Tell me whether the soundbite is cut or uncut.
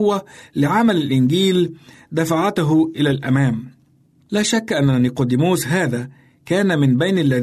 uncut